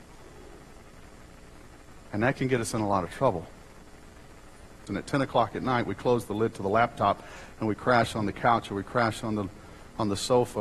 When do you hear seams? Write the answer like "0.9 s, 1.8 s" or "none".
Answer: 4.9 s